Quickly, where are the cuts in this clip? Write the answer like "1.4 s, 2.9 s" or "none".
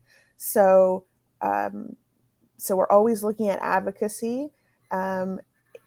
none